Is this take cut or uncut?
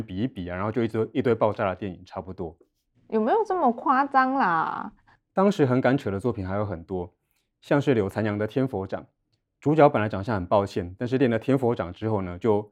uncut